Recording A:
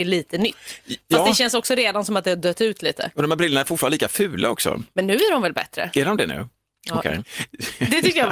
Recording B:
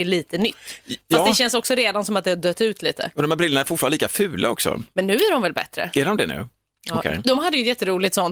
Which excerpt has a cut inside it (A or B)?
A